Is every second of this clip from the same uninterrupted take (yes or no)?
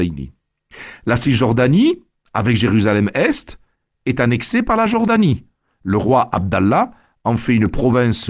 yes